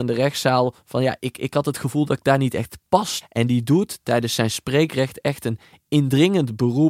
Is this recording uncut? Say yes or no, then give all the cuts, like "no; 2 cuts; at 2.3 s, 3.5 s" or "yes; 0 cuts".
no; 1 cut; at 3.2 s